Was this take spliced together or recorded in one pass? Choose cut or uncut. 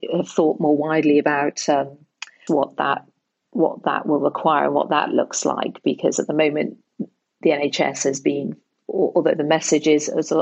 cut